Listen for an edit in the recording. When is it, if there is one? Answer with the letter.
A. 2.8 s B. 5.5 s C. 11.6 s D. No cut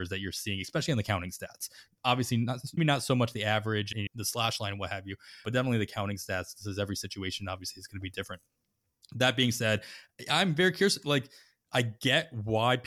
A